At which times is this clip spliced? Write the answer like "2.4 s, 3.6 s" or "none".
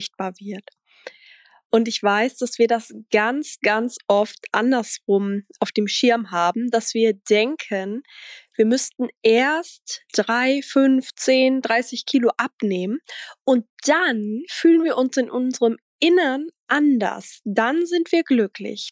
none